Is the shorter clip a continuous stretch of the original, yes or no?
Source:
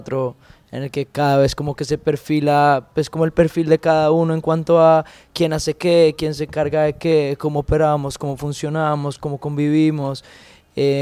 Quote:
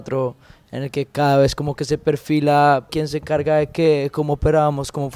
no